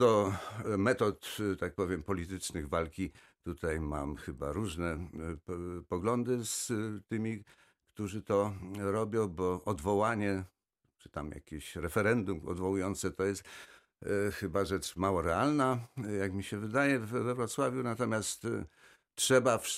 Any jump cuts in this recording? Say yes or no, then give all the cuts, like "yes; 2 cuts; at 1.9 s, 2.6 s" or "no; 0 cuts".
no; 0 cuts